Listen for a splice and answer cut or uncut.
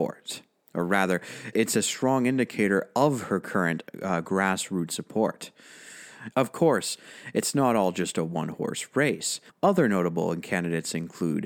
cut